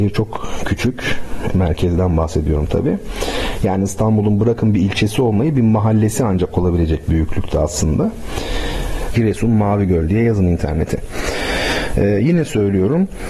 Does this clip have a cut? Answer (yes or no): yes